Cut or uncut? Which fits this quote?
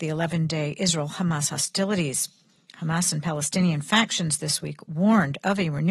uncut